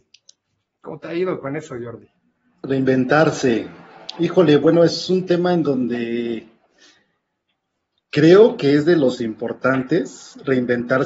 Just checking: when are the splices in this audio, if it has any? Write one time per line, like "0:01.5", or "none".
none